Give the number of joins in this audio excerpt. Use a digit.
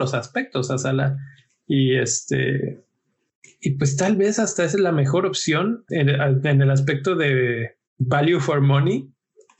2